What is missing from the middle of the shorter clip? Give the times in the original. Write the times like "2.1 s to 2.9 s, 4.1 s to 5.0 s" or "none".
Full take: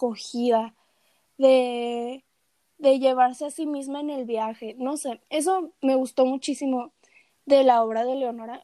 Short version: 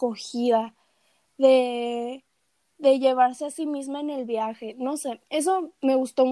none